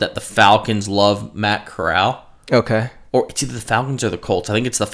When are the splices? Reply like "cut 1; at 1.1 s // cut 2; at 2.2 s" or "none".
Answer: none